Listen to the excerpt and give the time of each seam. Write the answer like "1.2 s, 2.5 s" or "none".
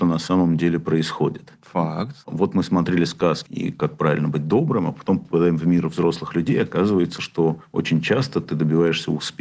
1.6 s, 3.5 s